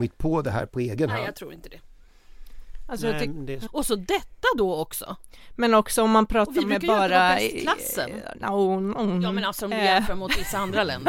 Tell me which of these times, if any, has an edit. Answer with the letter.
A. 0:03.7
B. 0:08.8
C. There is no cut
A